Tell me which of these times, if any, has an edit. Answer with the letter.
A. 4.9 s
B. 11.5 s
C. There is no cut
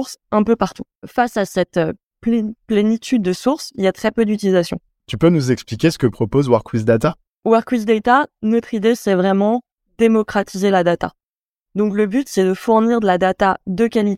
A